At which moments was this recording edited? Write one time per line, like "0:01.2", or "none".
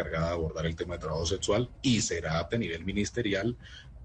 0:02.5